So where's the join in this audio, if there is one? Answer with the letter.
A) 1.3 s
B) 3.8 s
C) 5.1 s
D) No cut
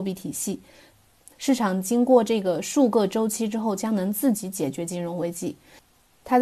A